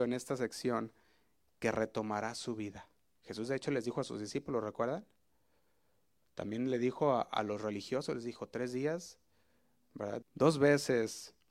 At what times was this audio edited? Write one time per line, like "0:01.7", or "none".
0:03.2
0:10.2